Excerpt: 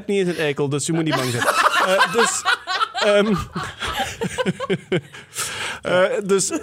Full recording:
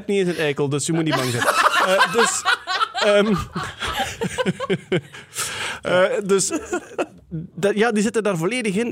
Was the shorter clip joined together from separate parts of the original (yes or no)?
no